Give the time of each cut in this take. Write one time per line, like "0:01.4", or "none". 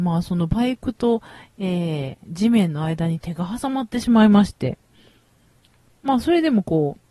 none